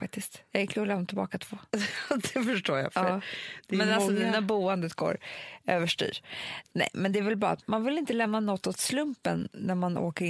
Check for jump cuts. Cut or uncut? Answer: uncut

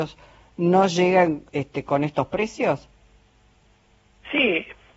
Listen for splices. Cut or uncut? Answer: uncut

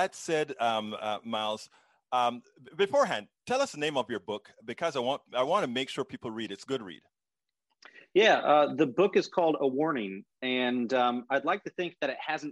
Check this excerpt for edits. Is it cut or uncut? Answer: uncut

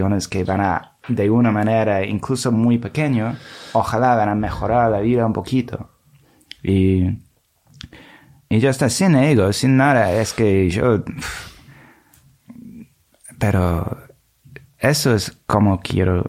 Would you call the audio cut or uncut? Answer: uncut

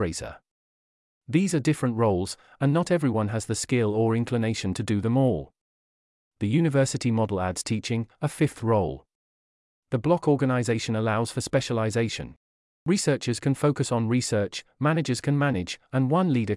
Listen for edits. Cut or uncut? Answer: uncut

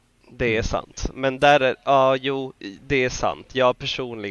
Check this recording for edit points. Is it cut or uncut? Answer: uncut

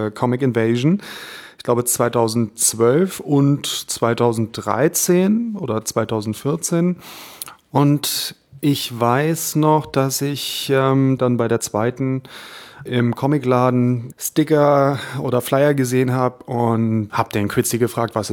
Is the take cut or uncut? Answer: cut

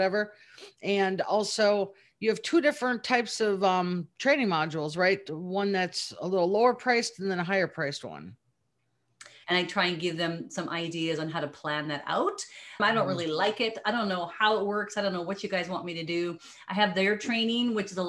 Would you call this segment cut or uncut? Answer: cut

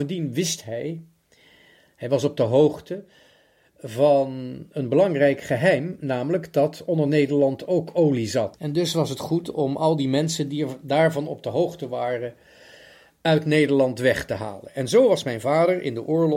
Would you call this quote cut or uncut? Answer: cut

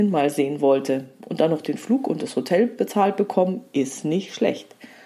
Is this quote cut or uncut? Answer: uncut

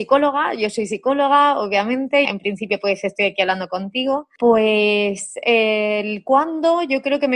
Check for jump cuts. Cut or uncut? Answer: cut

